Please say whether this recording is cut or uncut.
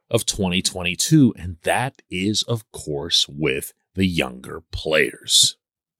uncut